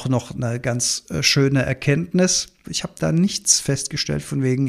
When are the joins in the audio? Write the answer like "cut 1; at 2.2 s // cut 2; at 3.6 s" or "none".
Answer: cut 1; at 2.6 s